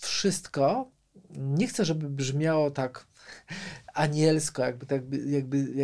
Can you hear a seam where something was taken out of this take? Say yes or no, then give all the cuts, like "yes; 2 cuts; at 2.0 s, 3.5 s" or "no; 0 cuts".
no; 0 cuts